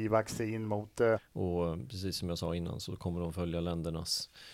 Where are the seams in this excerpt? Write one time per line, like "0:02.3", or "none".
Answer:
0:01.2

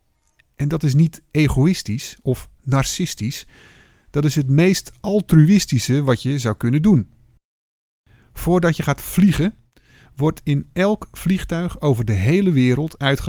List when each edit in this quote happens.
none

